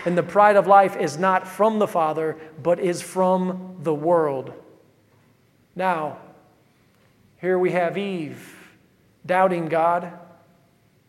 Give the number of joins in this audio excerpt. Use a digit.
0